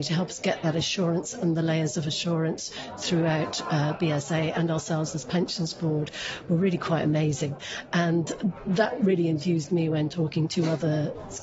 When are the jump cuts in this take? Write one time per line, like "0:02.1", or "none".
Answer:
none